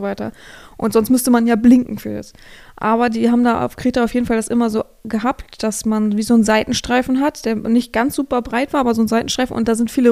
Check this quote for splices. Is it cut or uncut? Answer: uncut